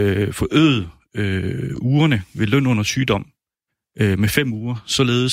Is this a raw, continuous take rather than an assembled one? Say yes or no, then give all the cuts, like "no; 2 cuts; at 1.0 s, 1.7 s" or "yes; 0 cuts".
yes; 0 cuts